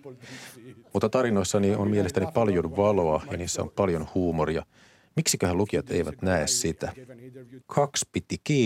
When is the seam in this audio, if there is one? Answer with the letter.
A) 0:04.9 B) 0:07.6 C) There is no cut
B